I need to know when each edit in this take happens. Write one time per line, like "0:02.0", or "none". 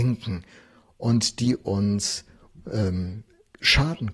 none